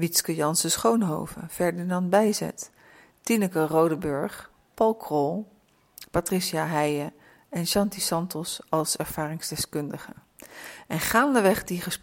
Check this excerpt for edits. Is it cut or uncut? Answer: uncut